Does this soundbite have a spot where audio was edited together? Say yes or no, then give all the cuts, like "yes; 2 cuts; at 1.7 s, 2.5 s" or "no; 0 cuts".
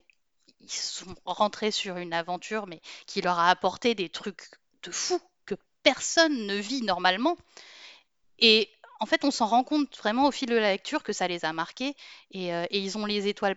no; 0 cuts